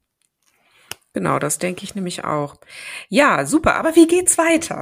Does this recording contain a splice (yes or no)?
no